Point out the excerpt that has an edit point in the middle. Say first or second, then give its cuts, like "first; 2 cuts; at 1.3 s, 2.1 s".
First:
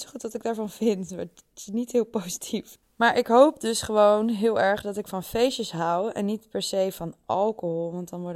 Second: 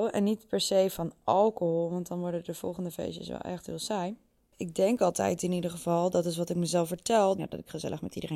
second; 1 cut; at 7.4 s